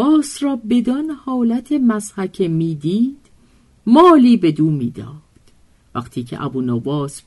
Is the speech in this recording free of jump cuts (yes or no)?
yes